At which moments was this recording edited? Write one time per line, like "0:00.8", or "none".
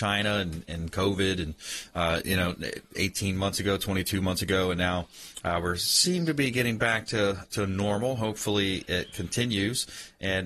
none

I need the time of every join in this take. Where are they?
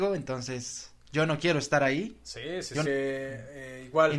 0:02.9

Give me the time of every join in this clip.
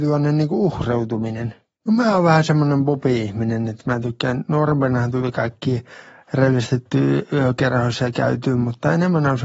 0:01.7

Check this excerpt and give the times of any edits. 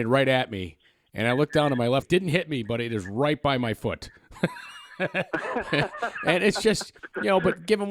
0:02.0

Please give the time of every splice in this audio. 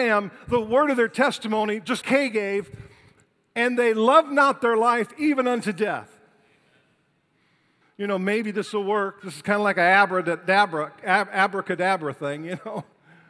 0:02.0
0:07.8

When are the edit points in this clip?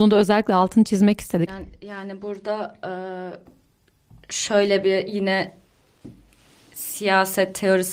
0:01.5

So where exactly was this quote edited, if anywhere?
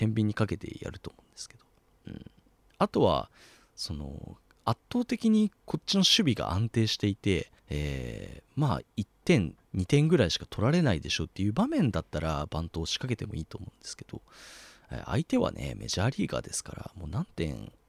0:07.6
0:09.6

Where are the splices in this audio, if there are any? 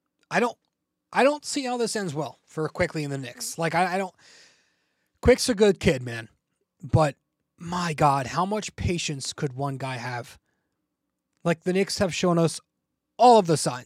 none

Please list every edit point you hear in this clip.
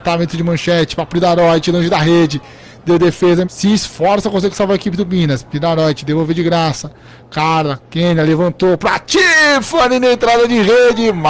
0:03.4

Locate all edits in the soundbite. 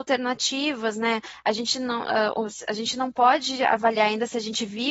none

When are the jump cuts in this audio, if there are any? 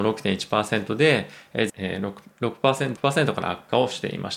0:01.7
0:03.0

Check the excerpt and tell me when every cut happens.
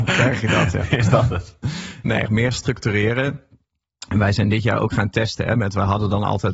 0:02.3

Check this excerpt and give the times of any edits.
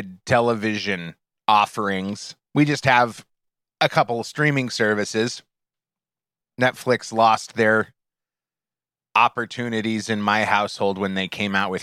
0:06.4

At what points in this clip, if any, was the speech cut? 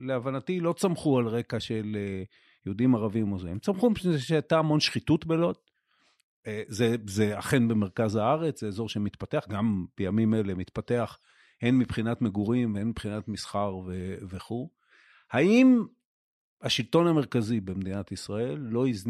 none

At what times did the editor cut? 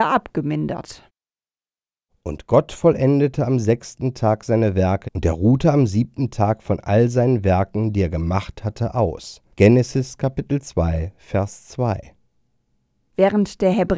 0:05.0
0:09.5

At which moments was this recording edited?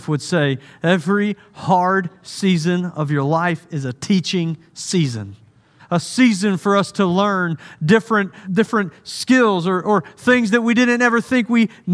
0:05.8
0:08.4

